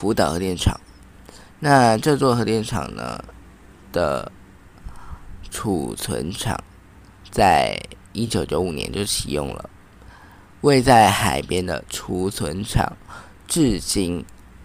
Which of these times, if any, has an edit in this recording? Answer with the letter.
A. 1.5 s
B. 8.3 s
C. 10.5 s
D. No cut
D